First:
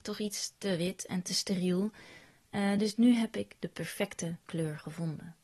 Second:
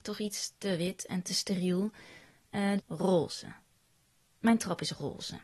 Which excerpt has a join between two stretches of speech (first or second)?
second